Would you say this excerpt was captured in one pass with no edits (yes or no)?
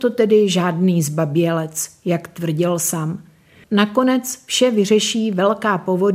no